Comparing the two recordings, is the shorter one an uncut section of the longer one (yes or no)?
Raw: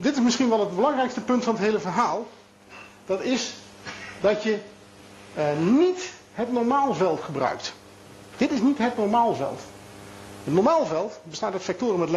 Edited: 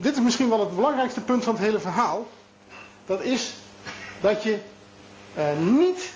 yes